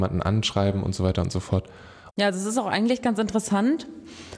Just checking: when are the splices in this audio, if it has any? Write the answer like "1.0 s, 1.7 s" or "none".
2.1 s